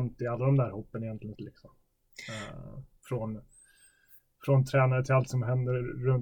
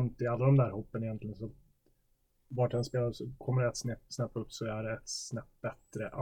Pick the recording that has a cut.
first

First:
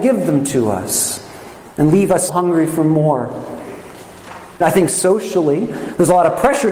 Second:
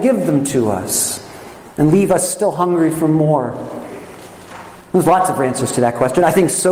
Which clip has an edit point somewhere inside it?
first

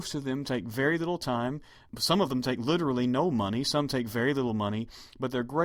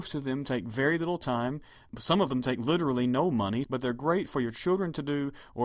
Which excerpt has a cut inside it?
second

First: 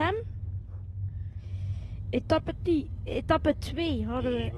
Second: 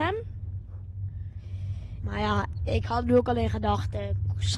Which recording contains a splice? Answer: second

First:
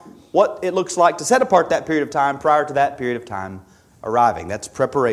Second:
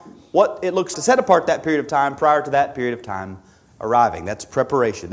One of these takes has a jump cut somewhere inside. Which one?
second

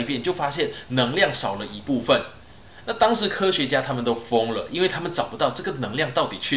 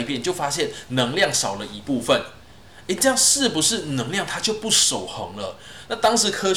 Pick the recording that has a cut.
first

